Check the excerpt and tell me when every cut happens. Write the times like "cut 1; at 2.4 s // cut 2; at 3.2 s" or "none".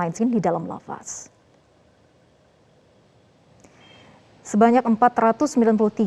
none